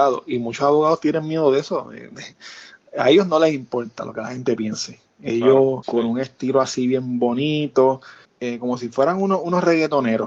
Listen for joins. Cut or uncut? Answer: cut